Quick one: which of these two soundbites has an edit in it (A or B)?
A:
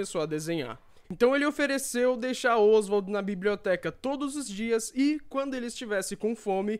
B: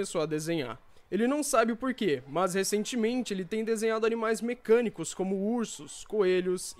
A